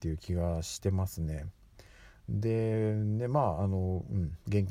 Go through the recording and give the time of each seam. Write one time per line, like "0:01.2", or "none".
none